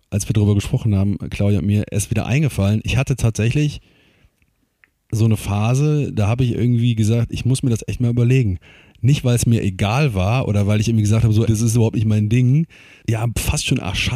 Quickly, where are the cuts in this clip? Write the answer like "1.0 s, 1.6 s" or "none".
11.5 s, 13.0 s